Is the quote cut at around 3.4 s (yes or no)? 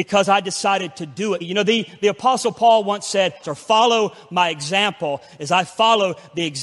yes